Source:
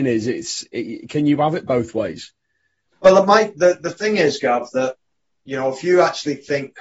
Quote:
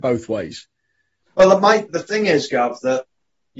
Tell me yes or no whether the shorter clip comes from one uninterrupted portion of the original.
no